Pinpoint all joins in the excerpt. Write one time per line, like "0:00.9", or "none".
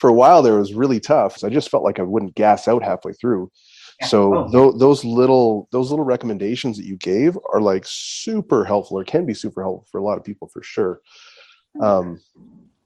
0:01.4